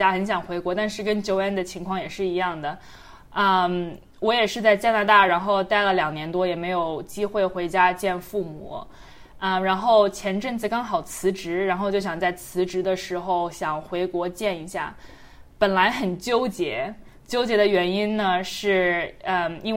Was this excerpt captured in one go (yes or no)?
yes